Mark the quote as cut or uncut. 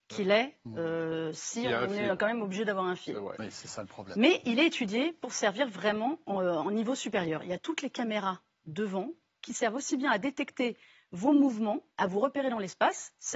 cut